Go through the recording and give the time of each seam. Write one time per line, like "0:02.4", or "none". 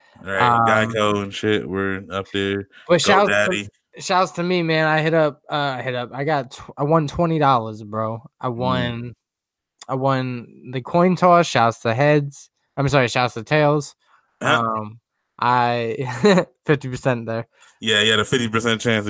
none